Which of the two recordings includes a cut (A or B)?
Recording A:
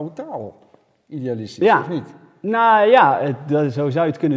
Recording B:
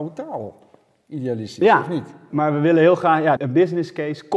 B